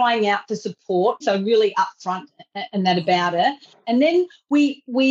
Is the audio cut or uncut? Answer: cut